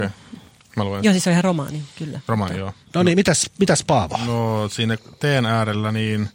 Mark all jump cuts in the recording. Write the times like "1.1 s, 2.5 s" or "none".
2.9 s